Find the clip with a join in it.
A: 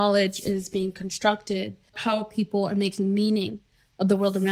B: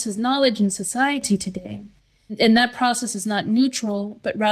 A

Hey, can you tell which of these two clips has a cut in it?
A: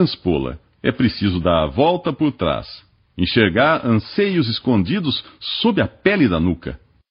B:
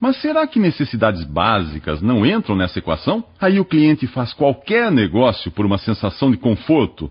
B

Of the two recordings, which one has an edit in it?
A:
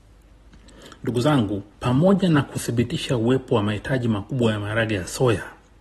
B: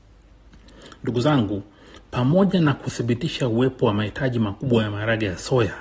A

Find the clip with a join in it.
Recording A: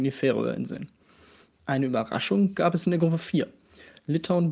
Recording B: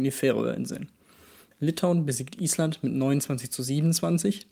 B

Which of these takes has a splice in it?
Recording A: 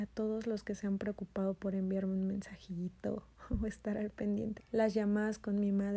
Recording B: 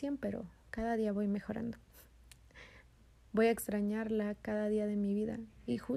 A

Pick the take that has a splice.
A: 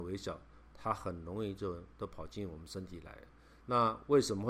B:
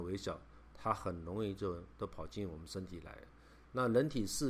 A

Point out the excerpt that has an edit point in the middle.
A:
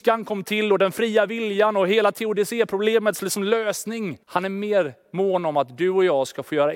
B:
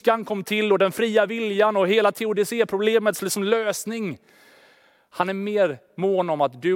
A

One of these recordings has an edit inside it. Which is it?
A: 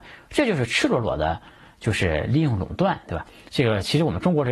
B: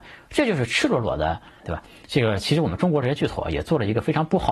B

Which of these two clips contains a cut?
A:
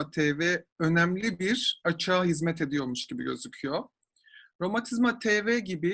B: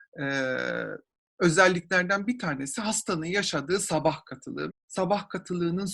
B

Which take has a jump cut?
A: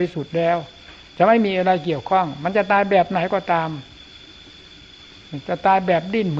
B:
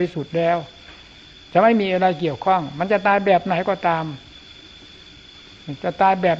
A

